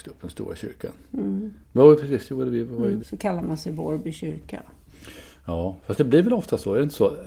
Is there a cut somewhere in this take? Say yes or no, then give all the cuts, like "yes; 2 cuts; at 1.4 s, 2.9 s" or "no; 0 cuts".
yes; 2 cuts; at 1.6 s, 3.0 s